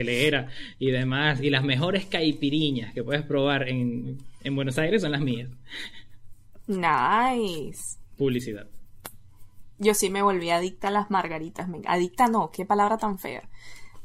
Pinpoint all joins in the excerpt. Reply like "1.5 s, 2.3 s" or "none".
none